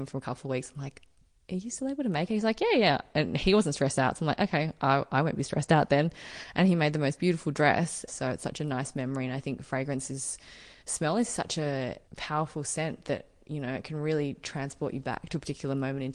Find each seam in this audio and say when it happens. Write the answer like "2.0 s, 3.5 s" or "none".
8.1 s